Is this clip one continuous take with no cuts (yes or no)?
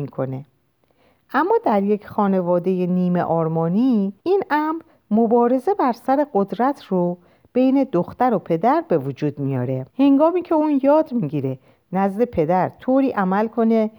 no